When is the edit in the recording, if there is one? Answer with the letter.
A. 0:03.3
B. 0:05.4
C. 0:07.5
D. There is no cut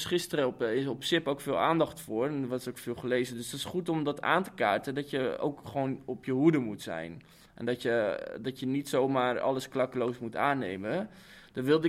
B